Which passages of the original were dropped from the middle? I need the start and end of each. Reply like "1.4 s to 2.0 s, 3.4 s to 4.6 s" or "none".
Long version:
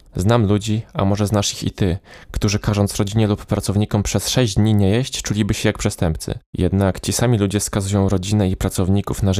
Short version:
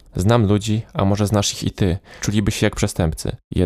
2.2 s to 5.2 s